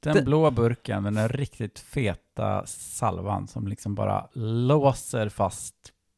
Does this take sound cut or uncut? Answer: uncut